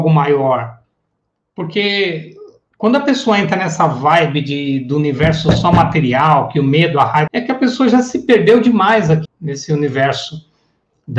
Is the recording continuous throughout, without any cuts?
no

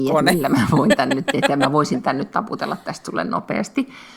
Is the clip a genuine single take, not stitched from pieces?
yes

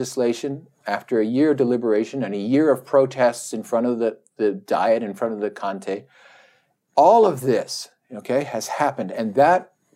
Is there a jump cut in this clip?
no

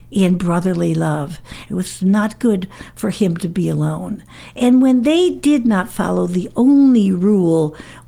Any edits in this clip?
yes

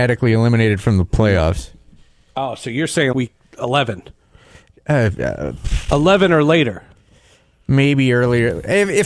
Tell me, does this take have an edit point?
yes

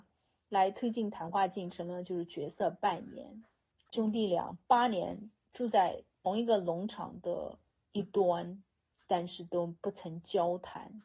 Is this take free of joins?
no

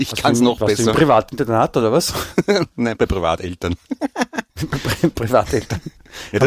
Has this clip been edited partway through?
yes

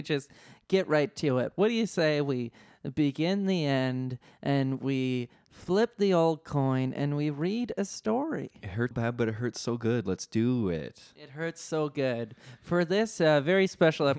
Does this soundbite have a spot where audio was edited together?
yes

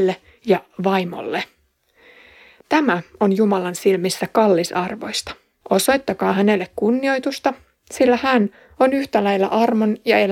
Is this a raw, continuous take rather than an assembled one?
no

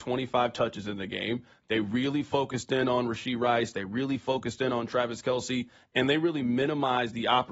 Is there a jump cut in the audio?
no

